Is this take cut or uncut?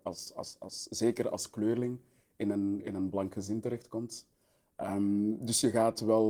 uncut